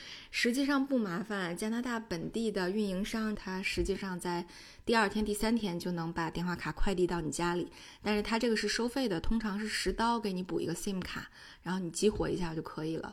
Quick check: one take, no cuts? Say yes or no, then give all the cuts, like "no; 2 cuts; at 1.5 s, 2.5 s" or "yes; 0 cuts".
no; 1 cut; at 3.3 s